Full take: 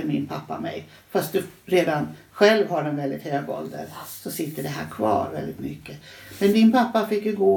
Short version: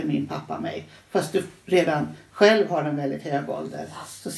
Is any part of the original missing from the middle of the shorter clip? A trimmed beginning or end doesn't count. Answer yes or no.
no